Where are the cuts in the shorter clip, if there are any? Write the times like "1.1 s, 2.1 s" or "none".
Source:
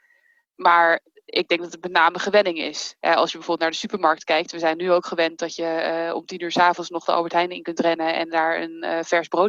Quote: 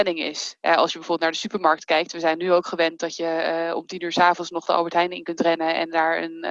none